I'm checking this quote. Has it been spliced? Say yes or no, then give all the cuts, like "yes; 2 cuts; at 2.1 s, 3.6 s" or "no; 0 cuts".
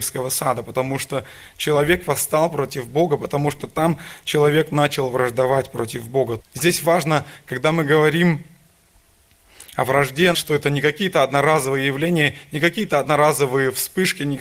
yes; 2 cuts; at 6.4 s, 10.3 s